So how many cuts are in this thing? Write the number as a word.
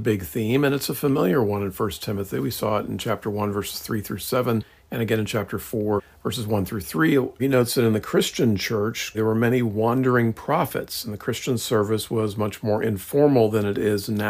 two